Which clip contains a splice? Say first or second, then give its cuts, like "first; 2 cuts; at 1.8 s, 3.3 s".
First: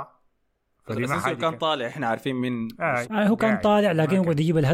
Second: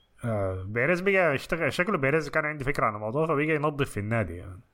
first; 1 cut; at 3.0 s